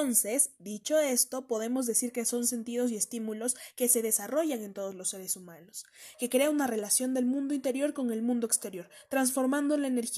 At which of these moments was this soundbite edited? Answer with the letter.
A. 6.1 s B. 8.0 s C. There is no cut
A